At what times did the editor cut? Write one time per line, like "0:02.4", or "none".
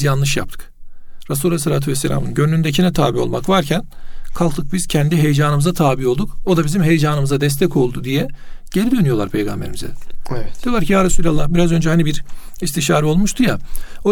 none